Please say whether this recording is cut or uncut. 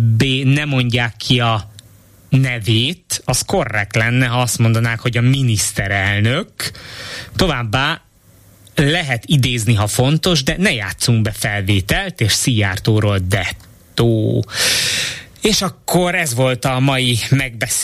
uncut